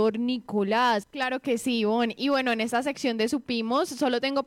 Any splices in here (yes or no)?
yes